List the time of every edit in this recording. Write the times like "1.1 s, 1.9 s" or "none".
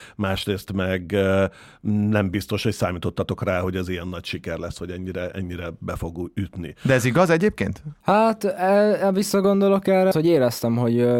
8.0 s, 10.1 s